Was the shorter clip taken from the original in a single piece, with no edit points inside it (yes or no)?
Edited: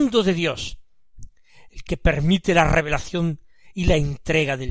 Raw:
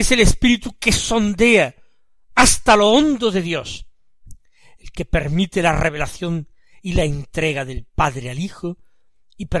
yes